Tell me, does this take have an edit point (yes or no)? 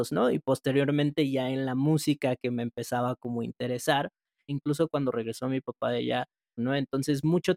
yes